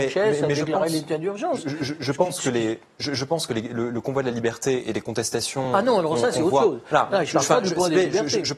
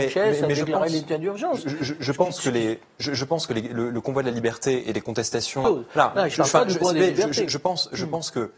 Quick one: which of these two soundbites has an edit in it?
second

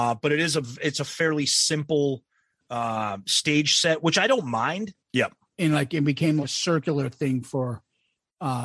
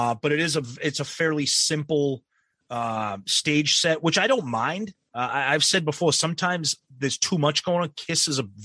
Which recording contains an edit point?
first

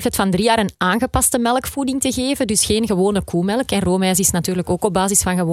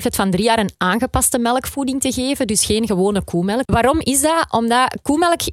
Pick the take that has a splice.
second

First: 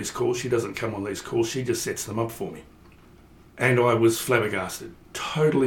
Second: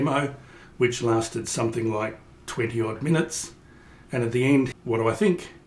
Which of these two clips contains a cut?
second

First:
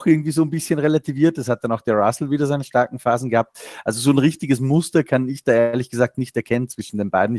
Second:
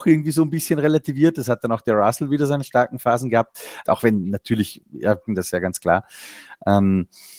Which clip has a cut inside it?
second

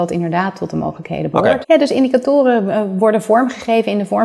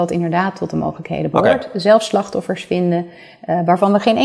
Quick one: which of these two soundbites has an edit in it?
first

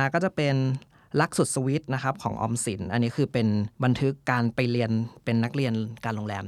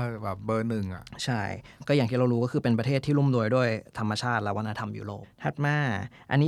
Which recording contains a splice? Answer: first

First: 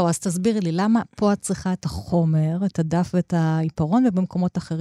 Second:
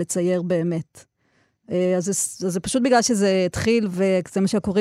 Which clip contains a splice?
second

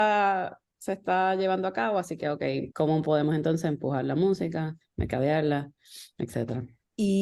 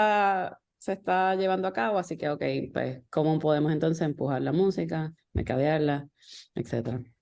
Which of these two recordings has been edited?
first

